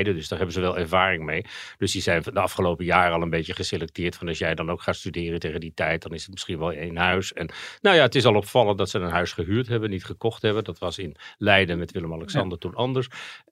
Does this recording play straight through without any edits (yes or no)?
yes